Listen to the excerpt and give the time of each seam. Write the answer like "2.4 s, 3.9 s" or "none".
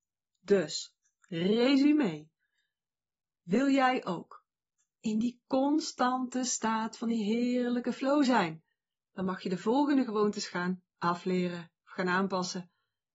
none